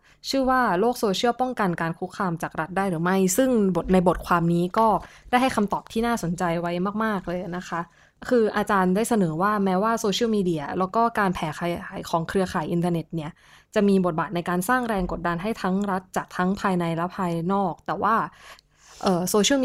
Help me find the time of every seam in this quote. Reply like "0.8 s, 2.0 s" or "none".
none